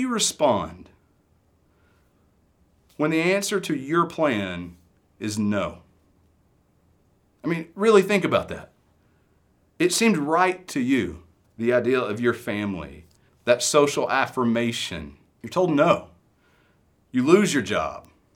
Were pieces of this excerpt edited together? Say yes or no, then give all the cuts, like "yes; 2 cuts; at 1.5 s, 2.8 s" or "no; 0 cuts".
yes; 3 cuts; at 11.4 s, 13.3 s, 15.4 s